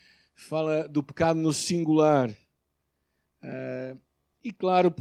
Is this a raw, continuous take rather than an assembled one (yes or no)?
yes